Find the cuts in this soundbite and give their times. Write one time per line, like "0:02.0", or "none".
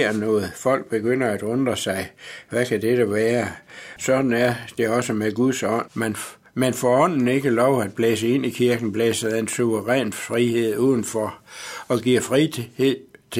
0:04.0
0:05.9